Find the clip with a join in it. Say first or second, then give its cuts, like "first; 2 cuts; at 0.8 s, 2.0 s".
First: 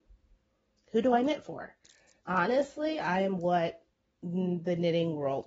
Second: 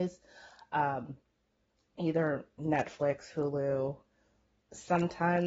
first; 1 cut; at 2.2 s